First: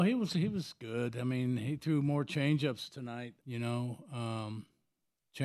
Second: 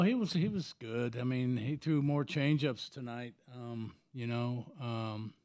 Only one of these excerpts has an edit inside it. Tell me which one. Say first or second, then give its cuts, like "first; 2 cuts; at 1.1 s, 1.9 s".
first; 1 cut; at 3.4 s